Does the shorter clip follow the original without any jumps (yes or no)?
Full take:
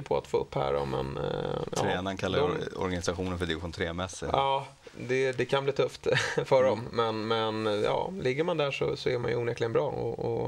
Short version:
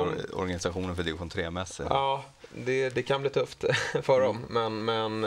yes